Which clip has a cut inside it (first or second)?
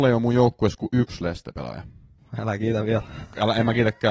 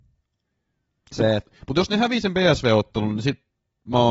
first